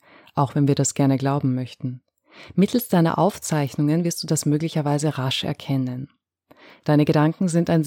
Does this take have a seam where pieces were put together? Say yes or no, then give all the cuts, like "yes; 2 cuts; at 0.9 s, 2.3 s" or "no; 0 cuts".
no; 0 cuts